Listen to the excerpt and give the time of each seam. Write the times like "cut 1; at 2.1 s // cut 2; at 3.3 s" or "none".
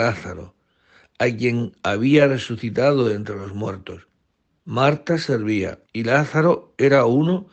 cut 1; at 4.6 s // cut 2; at 5.8 s